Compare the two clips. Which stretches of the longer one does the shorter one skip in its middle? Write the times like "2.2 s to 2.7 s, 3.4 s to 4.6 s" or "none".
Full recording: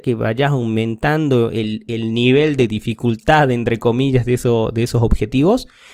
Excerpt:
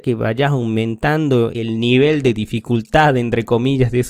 1.5 s to 1.8 s